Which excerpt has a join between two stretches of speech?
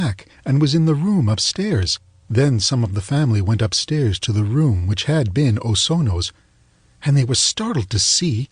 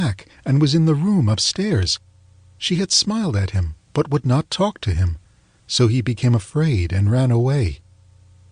first; 1 cut; at 2.2 s

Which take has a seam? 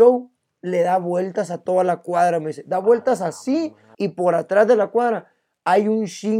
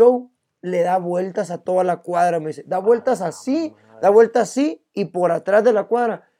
first; 1 cut; at 3.9 s

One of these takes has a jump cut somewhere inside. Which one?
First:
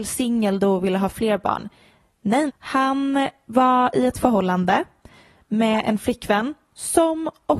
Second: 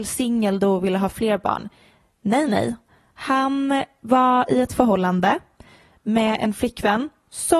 first; 1 cut; at 2.5 s

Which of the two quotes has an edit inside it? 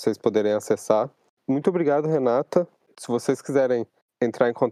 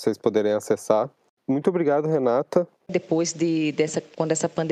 second; 1 cut; at 2.9 s

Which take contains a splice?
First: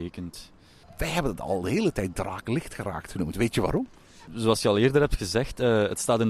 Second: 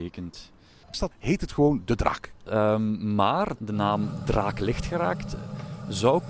second; 2 cuts; at 0.9 s, 2.5 s

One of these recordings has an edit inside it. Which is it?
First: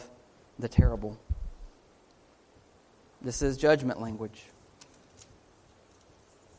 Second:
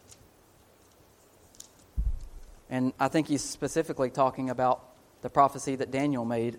first; 1 cut; at 3.1 s

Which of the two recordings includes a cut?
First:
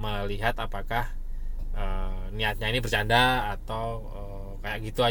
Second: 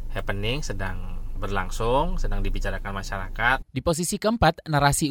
second; 2 cuts; at 1.4 s, 3.6 s

